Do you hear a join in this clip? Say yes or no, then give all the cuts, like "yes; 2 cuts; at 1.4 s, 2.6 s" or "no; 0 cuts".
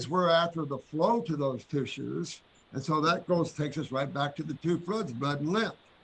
no; 0 cuts